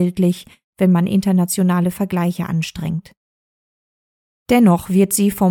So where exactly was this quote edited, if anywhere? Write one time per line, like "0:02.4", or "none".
none